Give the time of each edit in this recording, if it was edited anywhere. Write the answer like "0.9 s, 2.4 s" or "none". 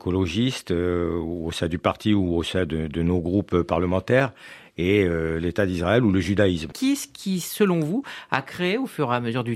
6.7 s